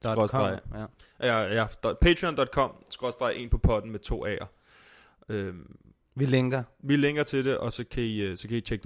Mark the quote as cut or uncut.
uncut